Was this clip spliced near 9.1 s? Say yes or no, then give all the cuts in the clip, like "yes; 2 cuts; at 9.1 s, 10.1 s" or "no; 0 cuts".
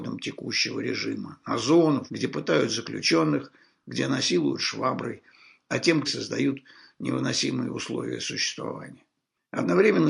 no; 2 cuts; at 2.1 s, 6.0 s